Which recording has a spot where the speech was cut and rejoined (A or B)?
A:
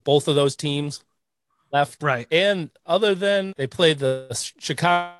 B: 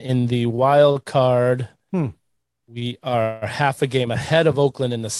A